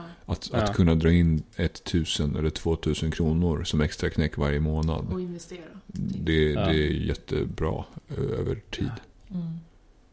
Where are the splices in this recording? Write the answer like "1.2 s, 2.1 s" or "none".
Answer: none

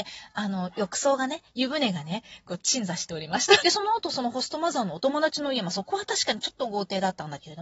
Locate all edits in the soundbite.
3.6 s

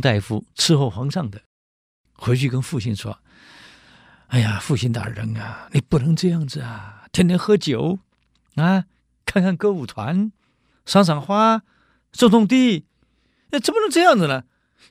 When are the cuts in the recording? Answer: 10.7 s

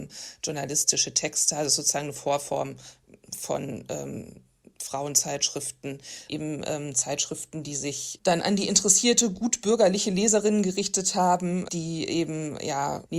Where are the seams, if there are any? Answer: 8.2 s, 11.7 s

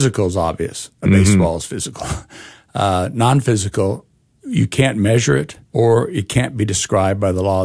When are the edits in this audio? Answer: 5.6 s

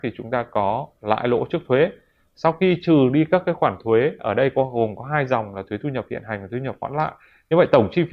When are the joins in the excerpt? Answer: none

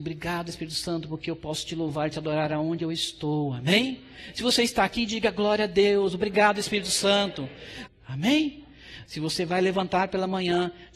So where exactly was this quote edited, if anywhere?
7.9 s, 9.1 s

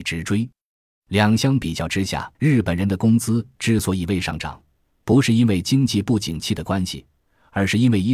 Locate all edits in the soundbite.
2.3 s

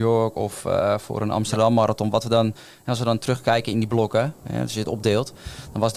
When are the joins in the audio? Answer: none

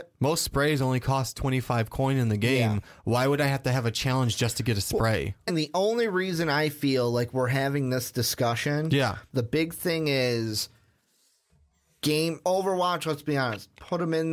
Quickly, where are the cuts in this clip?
5.5 s, 9.3 s, 12.4 s

